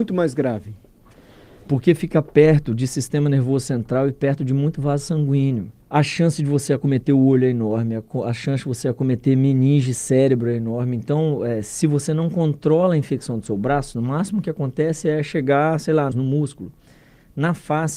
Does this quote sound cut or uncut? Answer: cut